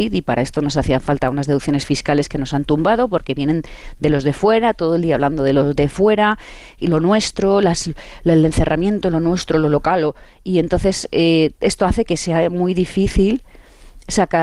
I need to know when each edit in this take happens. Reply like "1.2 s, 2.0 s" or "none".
none